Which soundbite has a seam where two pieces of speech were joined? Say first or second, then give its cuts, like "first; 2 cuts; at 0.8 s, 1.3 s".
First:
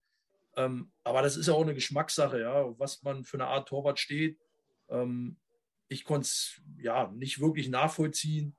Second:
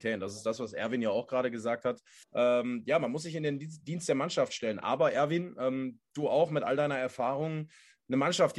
second; 1 cut; at 2.2 s